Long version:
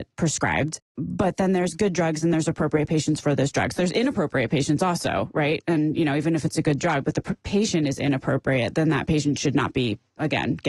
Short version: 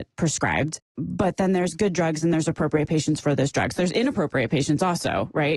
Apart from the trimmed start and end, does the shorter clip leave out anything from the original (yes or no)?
no